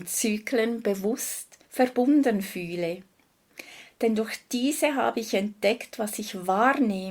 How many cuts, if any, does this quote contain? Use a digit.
1